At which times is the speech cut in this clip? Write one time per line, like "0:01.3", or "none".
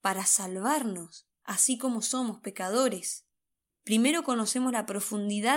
0:01.4
0:03.7